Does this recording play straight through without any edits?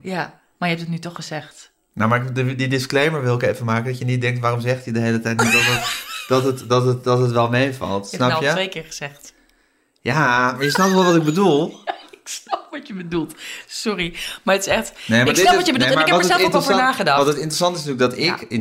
yes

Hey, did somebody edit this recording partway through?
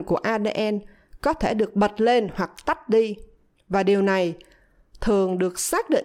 no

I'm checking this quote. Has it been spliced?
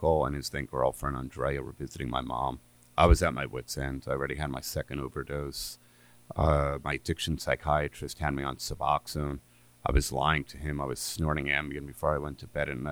no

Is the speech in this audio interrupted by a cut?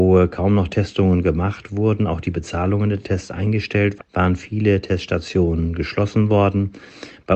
yes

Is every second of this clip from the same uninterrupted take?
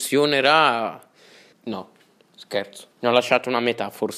no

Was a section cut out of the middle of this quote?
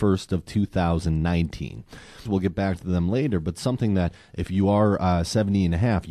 yes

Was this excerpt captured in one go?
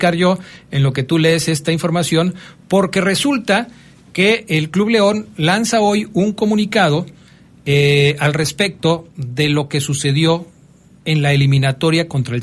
yes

